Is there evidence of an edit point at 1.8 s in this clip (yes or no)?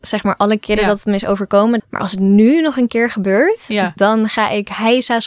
yes